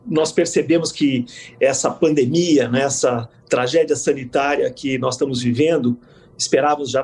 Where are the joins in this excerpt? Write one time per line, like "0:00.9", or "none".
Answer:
none